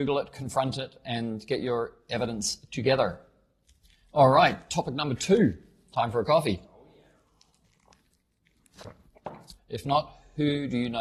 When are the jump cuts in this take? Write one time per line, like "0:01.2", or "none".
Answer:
0:09.6